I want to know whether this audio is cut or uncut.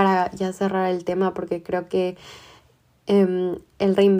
uncut